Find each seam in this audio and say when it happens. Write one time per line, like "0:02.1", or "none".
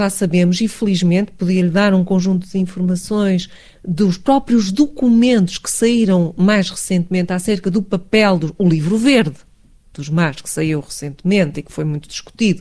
none